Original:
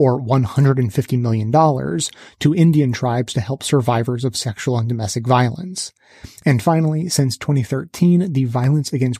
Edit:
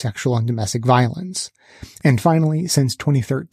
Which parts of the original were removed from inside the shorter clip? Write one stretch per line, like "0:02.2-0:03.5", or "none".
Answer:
none